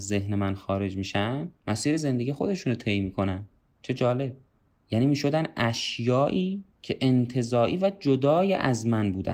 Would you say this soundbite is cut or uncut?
cut